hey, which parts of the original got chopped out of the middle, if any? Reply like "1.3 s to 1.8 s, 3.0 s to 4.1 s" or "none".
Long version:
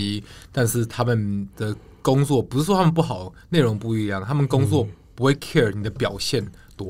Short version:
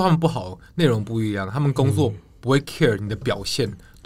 none